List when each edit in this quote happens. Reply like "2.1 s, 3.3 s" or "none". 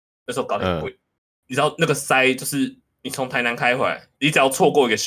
4.1 s